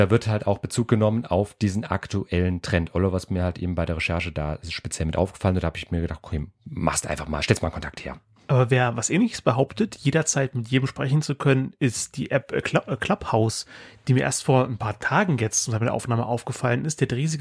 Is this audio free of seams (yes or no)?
yes